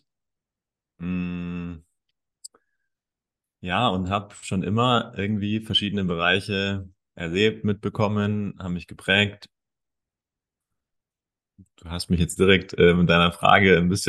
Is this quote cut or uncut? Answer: uncut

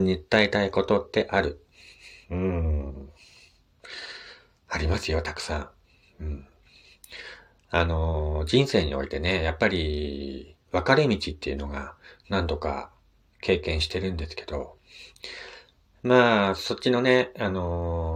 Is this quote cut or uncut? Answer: uncut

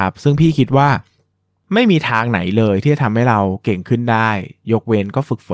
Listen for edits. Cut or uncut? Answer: uncut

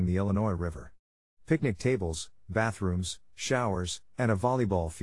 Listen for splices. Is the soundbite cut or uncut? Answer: uncut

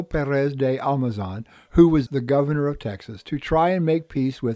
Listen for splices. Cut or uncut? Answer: cut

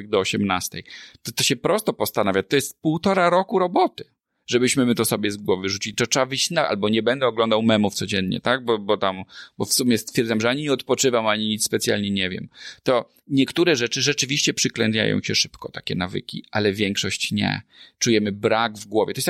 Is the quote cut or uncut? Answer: uncut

